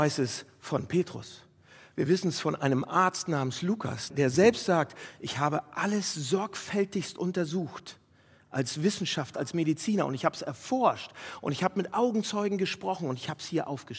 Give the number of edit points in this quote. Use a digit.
2